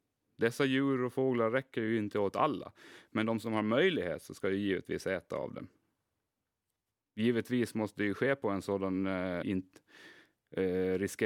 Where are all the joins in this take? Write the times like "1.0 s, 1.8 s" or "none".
9.4 s